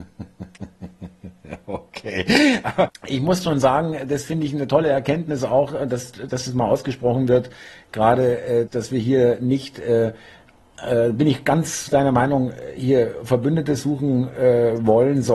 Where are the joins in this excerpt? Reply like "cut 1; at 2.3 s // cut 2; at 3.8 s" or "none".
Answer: cut 1; at 2.9 s // cut 2; at 8.7 s